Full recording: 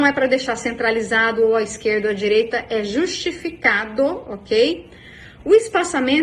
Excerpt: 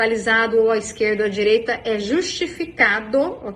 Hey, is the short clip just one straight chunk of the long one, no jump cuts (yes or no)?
yes